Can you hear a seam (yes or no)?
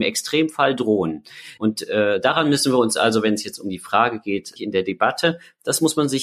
yes